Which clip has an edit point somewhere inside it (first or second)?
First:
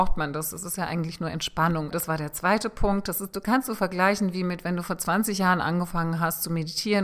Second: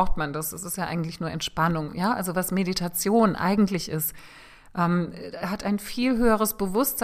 first